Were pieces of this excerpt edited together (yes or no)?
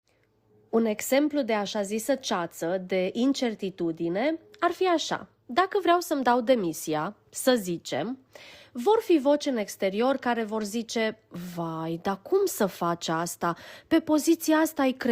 no